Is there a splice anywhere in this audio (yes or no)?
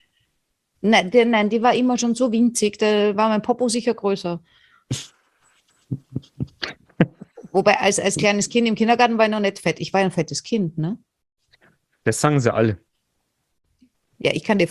no